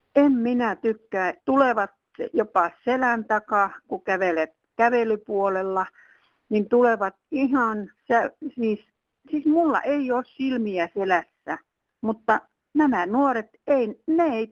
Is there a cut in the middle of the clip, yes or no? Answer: yes